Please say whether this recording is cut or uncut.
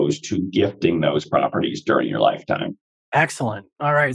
uncut